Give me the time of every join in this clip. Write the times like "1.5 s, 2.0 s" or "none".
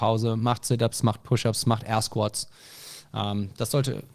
none

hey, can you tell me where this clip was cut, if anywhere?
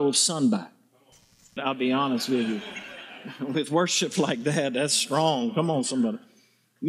1.6 s

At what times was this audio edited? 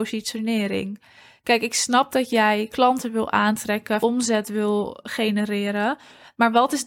4.0 s

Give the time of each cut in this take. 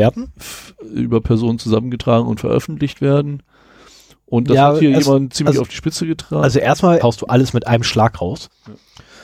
7.0 s

